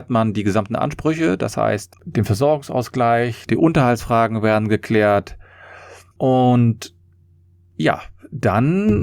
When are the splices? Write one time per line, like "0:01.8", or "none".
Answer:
0:03.5
0:06.1